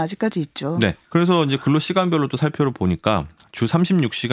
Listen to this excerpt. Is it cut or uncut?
cut